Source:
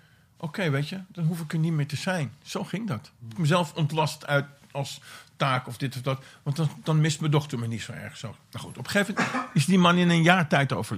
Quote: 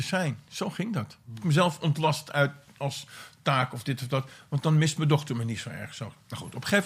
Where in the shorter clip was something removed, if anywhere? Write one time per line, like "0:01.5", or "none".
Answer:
0:04.6